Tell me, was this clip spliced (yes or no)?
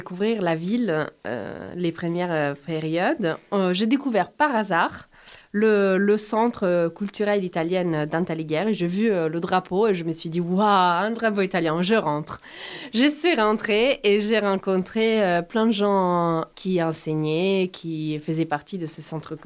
no